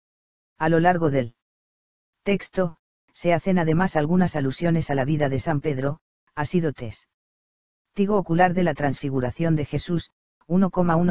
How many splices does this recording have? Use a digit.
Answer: 0